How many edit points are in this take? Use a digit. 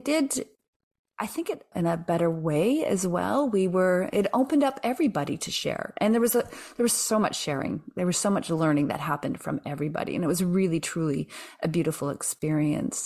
1